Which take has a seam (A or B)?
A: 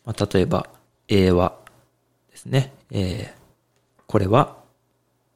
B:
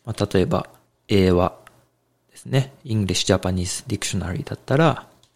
A